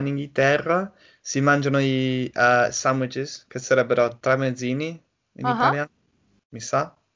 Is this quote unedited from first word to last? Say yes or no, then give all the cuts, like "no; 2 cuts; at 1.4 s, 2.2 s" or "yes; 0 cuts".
yes; 0 cuts